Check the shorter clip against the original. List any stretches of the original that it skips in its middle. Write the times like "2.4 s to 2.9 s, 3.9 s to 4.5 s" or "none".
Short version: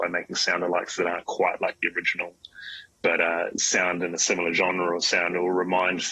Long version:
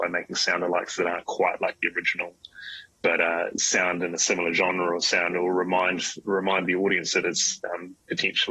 none